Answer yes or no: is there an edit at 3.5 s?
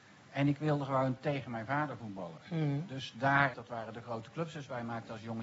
yes